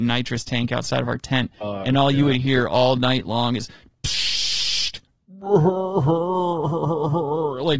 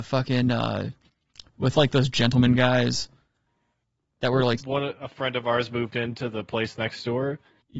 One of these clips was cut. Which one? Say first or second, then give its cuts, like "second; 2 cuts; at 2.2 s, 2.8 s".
second; 1 cut; at 4.6 s